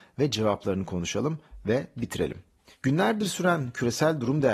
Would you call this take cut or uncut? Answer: uncut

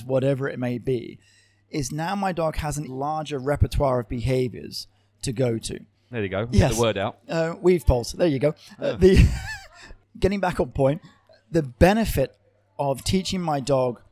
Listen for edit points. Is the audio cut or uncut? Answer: cut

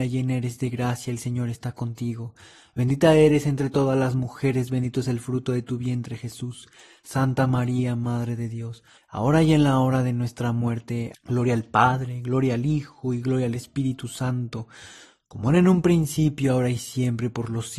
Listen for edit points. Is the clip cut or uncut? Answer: cut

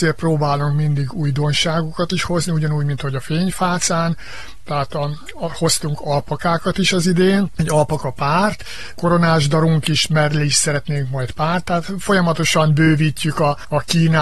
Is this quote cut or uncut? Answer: uncut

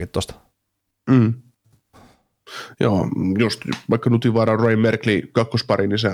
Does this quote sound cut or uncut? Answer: cut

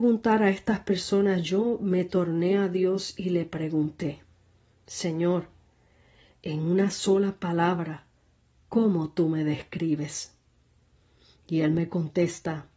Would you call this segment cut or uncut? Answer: uncut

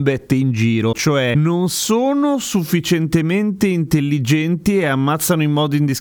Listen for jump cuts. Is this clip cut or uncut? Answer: cut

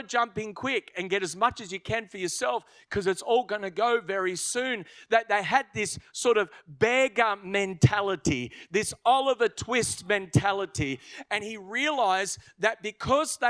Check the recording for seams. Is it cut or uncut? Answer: cut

